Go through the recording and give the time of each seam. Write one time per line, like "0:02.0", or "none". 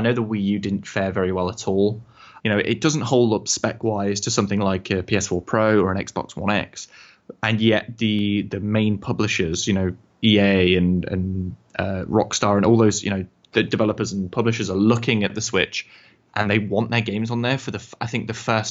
0:02.4